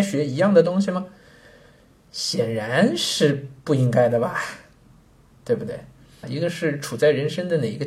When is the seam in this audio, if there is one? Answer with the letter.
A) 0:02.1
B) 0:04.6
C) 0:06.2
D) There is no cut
C